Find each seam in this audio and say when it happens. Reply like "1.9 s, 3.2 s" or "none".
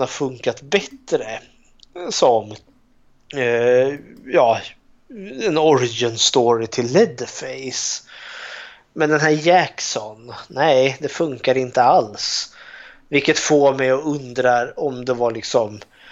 none

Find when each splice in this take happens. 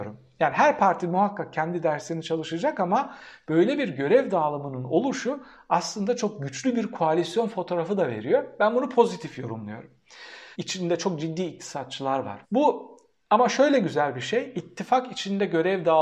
10.5 s, 12.4 s

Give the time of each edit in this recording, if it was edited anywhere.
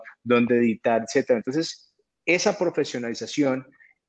none

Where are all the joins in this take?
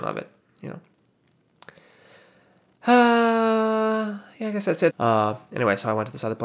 4.9 s

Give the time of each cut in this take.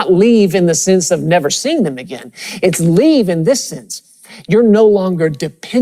none

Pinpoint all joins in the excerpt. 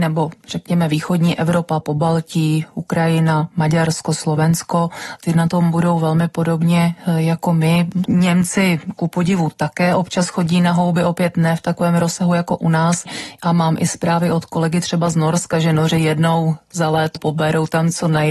1.8 s, 8.1 s, 17.2 s

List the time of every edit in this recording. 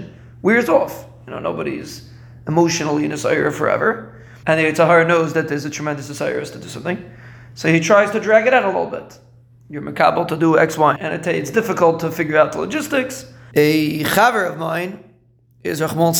4.4 s, 11.0 s, 13.5 s

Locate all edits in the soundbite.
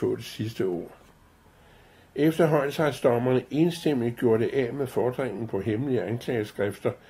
none

